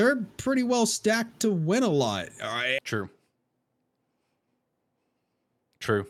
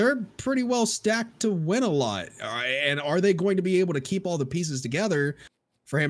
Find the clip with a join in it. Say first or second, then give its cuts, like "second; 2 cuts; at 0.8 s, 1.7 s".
first; 1 cut; at 2.8 s